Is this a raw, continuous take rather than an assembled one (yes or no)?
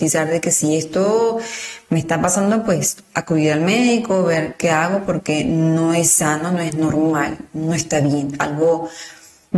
yes